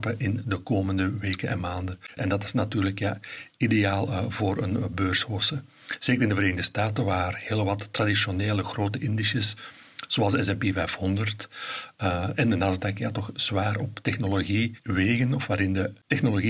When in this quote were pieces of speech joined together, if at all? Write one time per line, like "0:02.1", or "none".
0:02.2